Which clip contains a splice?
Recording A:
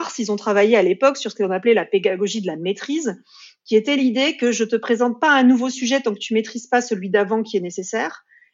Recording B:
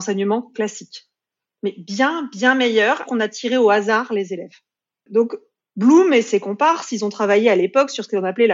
B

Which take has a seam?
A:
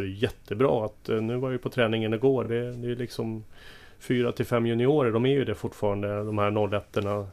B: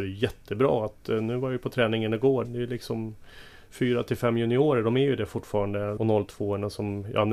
B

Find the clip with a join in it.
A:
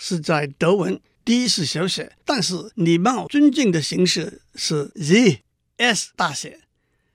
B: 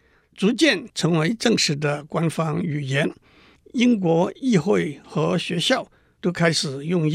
A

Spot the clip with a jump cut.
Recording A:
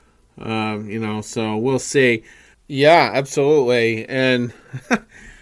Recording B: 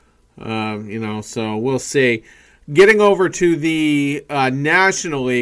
A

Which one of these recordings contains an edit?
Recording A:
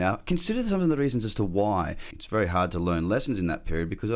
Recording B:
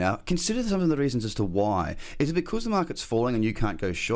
A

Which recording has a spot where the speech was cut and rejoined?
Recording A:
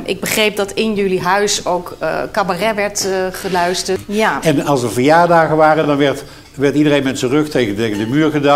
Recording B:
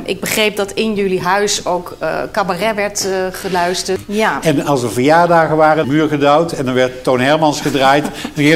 B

